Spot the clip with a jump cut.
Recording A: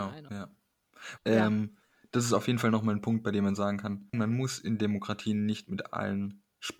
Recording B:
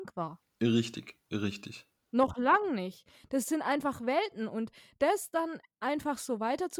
A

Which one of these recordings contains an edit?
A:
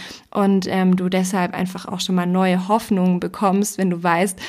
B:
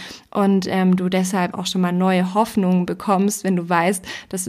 B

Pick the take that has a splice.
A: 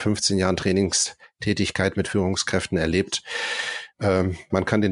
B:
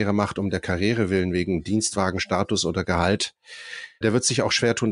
B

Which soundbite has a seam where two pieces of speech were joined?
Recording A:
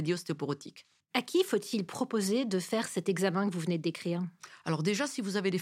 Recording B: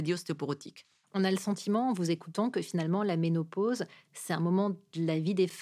A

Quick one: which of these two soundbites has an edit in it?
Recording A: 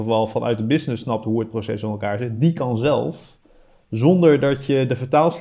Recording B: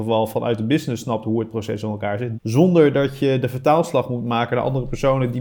B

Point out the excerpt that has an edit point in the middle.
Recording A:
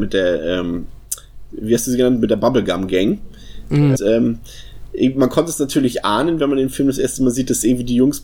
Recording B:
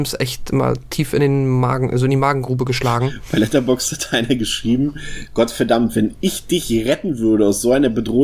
A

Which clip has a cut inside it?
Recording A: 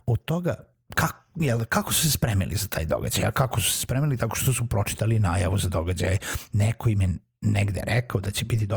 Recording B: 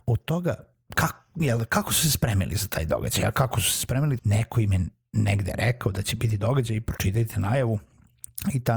B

